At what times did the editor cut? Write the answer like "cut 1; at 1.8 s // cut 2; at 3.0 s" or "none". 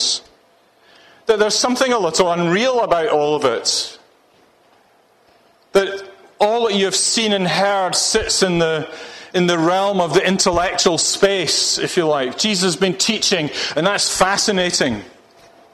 none